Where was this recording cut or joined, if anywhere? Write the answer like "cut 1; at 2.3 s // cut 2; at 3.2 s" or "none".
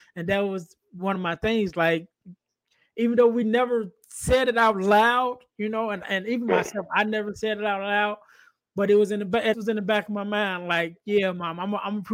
cut 1; at 9.5 s